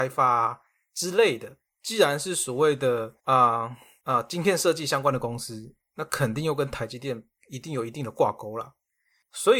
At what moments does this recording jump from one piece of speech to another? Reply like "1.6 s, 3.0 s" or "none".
1.7 s, 3.2 s, 7.4 s